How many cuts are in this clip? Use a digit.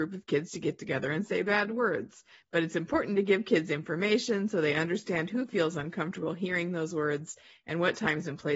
1